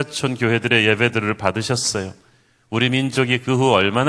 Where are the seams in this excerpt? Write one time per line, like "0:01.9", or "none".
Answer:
none